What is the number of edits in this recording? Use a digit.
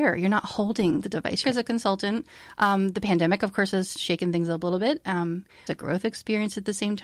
2